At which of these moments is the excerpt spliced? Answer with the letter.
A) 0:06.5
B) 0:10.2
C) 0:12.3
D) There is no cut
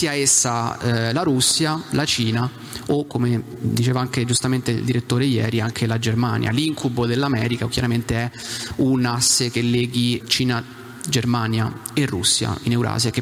B